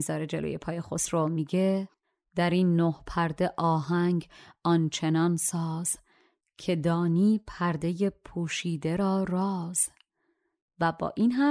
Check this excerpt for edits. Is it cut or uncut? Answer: uncut